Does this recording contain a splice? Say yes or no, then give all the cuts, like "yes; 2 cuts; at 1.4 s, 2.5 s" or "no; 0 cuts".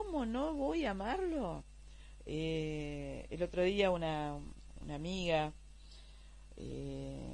yes; 1 cut; at 2.2 s